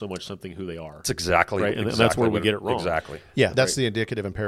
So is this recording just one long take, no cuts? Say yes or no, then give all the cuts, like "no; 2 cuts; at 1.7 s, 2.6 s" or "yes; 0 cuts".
no; 1 cut; at 3.5 s